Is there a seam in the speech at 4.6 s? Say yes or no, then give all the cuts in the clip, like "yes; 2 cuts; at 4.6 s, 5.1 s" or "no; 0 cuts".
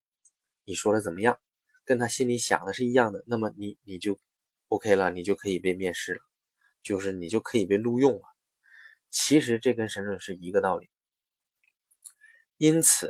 no; 0 cuts